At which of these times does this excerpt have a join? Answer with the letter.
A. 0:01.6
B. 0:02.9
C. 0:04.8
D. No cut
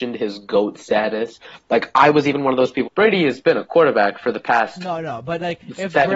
B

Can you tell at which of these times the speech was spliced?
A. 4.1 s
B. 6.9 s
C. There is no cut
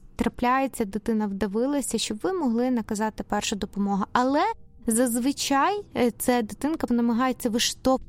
B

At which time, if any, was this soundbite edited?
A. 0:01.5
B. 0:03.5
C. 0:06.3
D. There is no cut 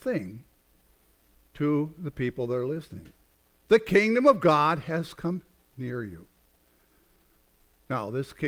D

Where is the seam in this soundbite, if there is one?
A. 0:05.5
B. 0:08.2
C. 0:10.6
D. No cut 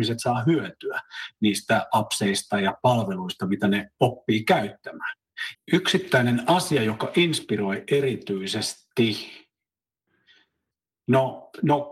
A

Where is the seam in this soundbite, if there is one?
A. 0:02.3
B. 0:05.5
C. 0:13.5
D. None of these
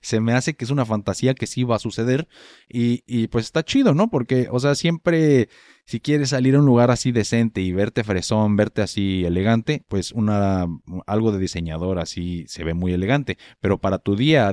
D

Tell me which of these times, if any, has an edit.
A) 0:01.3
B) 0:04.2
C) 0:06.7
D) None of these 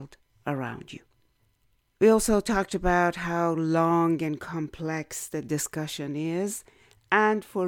D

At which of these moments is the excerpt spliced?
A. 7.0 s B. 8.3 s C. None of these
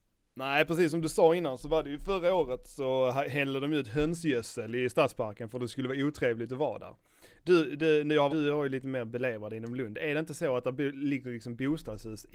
B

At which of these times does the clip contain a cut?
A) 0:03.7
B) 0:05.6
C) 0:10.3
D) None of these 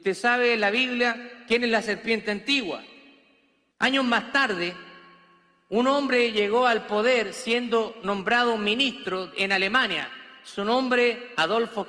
A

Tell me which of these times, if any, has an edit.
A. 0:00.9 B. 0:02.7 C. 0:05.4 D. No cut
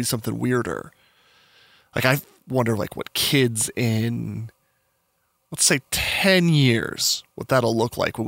D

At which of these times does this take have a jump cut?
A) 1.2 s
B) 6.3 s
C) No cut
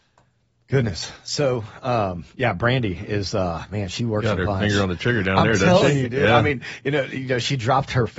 C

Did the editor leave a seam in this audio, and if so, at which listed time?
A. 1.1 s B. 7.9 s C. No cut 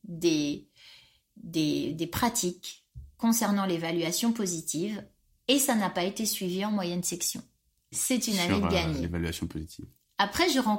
B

